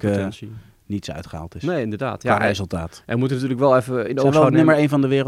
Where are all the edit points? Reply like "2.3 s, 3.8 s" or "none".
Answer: none